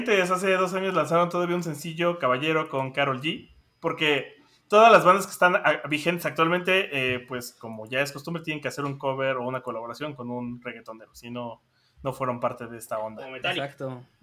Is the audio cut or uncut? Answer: uncut